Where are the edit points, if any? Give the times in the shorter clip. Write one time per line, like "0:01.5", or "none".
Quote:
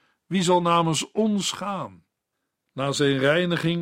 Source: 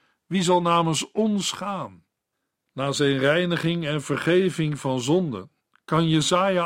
none